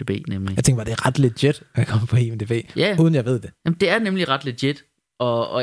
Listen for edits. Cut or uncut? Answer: uncut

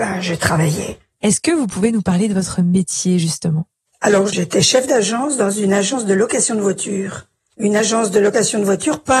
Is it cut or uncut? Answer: uncut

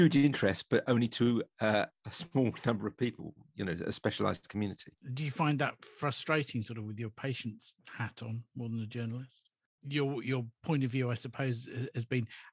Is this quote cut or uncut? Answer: cut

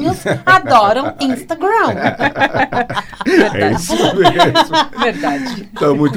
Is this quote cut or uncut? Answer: uncut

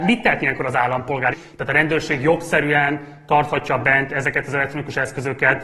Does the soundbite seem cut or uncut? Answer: cut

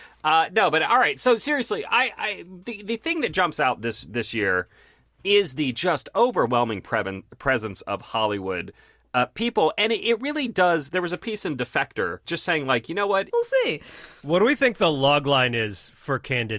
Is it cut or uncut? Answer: cut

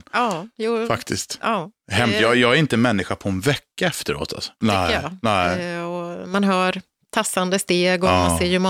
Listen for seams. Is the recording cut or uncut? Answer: cut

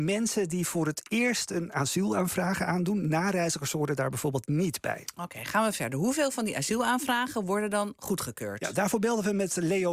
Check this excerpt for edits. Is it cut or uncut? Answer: uncut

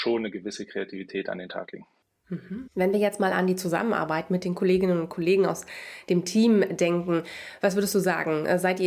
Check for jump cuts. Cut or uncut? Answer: cut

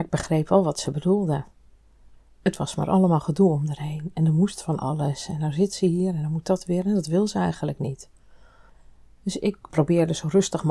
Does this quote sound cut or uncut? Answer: uncut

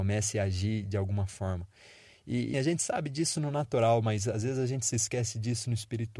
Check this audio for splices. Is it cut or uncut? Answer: cut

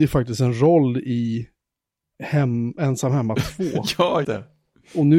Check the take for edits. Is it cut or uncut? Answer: cut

